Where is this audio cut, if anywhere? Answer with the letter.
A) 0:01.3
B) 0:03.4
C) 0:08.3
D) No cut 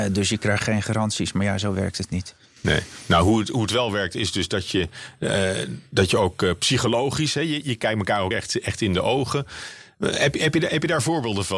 D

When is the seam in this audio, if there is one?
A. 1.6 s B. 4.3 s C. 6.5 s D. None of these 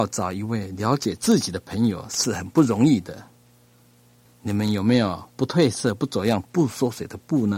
B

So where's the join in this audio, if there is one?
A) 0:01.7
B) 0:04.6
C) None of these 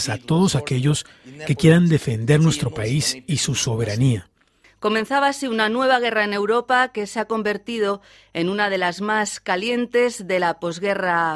B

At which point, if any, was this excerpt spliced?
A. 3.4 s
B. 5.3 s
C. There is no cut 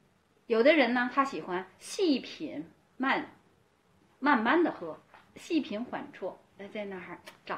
B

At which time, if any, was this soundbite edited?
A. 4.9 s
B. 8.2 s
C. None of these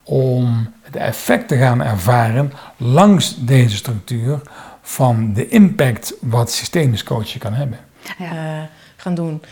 B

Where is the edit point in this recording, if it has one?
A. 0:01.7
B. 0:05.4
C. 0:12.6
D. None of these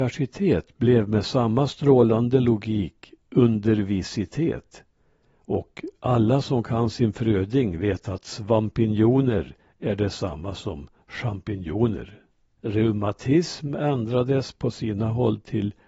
C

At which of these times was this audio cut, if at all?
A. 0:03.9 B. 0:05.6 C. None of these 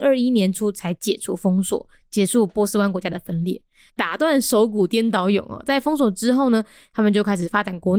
A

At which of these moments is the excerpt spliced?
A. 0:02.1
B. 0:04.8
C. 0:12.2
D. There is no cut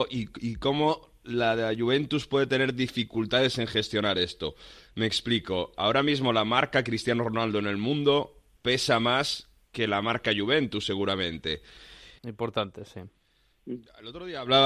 C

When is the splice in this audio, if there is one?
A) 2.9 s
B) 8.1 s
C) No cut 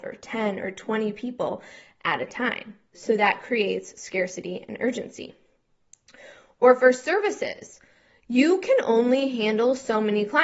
A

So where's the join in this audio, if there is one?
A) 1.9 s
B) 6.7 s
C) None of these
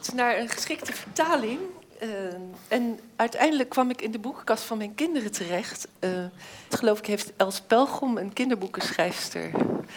B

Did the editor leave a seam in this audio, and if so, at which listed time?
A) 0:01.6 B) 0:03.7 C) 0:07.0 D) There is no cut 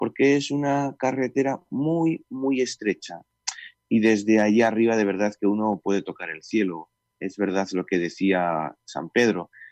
D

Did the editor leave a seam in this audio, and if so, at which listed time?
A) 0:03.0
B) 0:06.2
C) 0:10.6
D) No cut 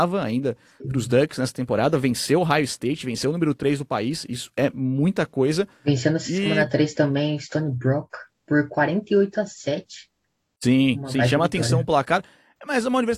C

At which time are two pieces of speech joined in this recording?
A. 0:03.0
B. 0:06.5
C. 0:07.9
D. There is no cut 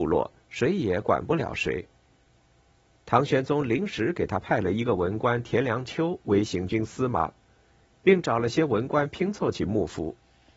A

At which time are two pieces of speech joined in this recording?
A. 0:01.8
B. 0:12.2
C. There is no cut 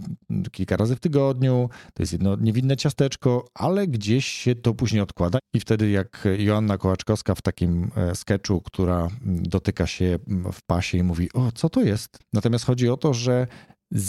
B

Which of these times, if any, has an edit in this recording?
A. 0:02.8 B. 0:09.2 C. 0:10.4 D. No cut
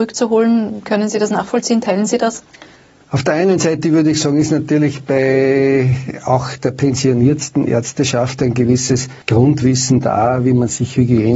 B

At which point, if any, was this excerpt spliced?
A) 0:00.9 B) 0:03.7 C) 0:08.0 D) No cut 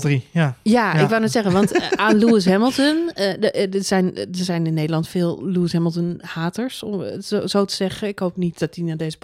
D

